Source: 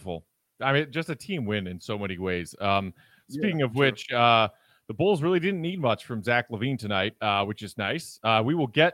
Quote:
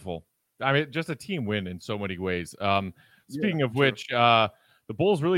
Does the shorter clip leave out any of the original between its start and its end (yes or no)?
no